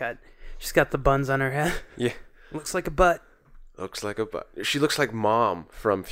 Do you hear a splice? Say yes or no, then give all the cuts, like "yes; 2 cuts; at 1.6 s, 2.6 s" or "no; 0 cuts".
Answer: no; 0 cuts